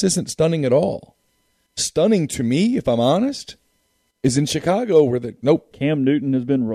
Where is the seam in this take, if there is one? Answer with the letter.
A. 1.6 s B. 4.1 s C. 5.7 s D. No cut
C